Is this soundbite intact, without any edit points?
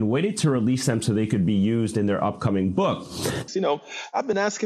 no; 1 cut; at 3.5 s

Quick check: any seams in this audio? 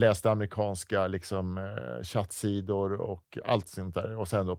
no; 0 cuts

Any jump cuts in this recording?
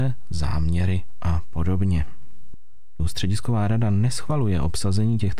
yes; 1 cut; at 3.0 s

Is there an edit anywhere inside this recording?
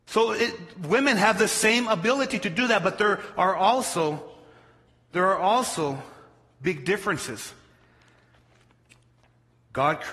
no; 0 cuts

